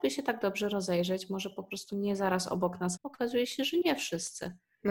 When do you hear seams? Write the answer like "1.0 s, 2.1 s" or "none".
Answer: 3.0 s

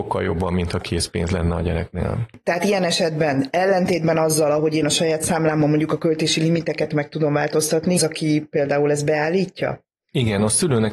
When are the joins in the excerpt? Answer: 8.0 s

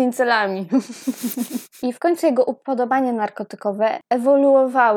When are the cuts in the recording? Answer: none

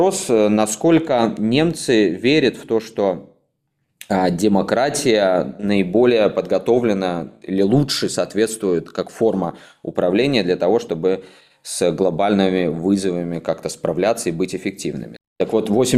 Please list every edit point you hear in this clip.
none

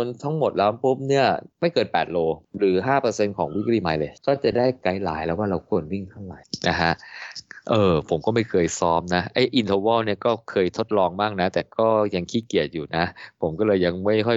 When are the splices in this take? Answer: none

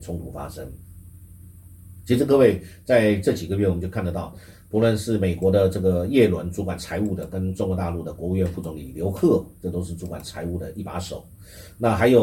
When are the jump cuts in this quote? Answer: none

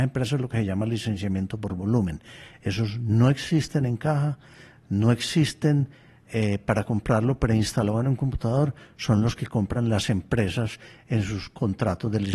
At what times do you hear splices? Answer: none

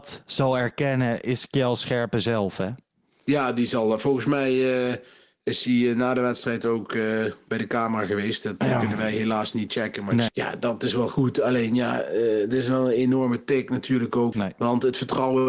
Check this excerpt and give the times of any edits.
10.3 s, 14.3 s

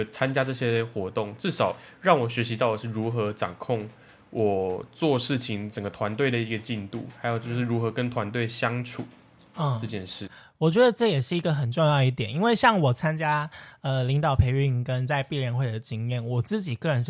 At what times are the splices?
none

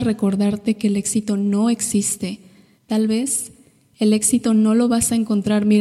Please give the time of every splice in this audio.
2.8 s

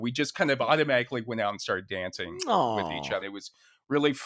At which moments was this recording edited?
3.2 s

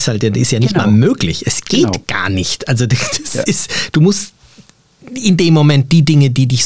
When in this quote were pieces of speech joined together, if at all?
none

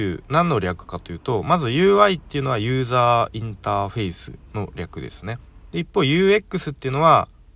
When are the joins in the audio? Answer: 5.7 s

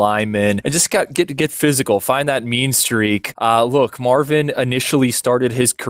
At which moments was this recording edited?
none

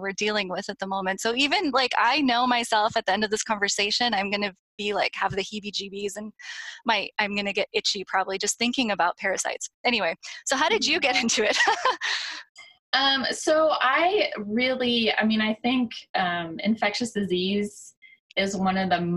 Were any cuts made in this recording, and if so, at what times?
none

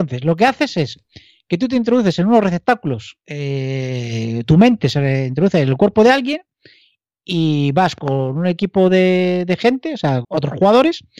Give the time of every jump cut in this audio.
10.2 s

